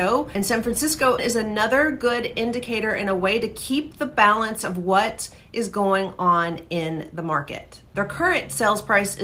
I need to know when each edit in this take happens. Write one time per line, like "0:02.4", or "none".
0:01.2